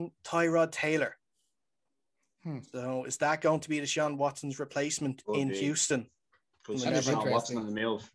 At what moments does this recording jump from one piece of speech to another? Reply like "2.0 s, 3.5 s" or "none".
none

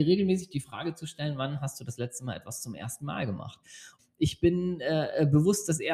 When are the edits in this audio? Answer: 4.0 s

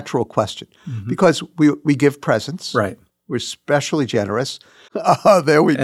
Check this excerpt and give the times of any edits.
4.9 s

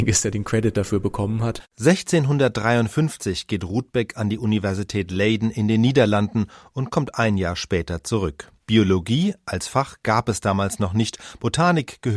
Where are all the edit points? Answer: 8.6 s

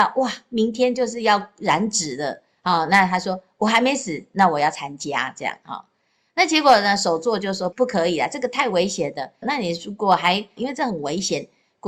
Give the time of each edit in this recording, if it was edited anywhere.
7.7 s, 9.4 s, 10.6 s

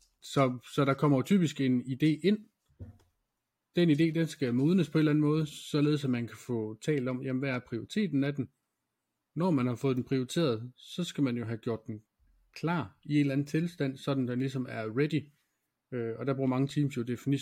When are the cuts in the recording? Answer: none

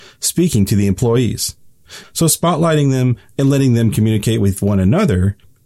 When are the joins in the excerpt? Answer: 2.0 s

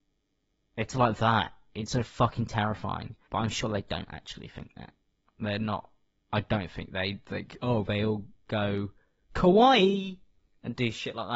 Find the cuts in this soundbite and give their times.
3.3 s

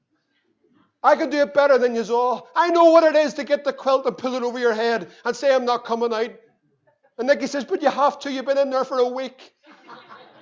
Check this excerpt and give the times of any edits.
none

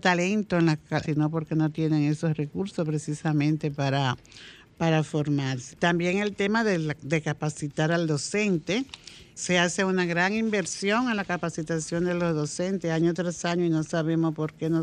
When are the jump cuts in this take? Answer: 1.0 s, 5.7 s, 9.4 s

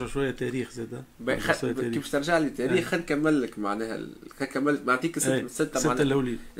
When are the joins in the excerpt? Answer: 5.4 s

